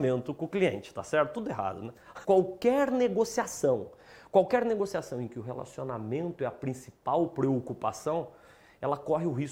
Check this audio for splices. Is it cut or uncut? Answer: cut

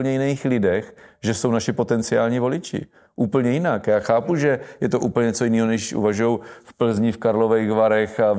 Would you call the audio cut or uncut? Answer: uncut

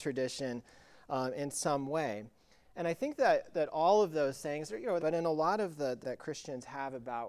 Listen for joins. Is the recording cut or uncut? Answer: cut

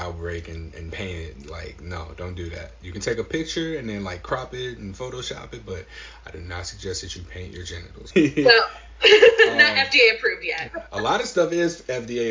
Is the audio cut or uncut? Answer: cut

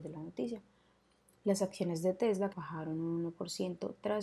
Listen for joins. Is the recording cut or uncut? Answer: cut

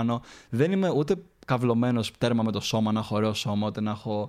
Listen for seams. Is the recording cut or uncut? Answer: uncut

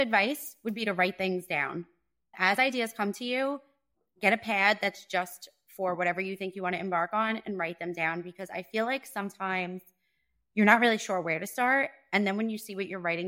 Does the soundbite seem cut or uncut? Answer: uncut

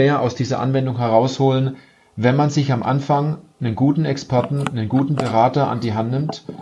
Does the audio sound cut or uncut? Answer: uncut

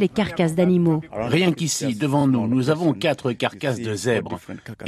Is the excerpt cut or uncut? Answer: uncut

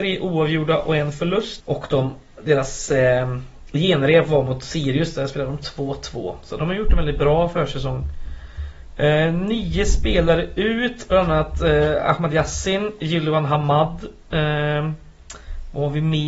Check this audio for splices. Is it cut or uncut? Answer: cut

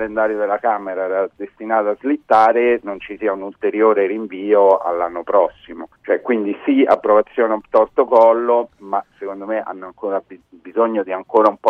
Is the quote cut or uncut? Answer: cut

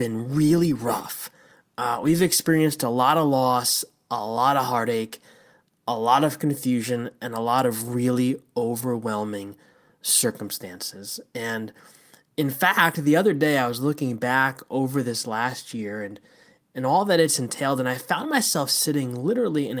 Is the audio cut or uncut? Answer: uncut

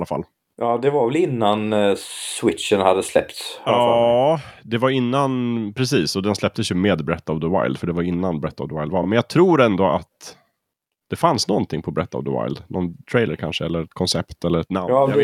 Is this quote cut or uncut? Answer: uncut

